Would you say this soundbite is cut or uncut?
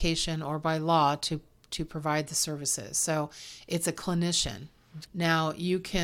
cut